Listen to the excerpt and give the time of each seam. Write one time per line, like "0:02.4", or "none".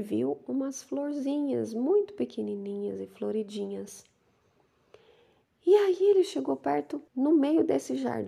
0:07.1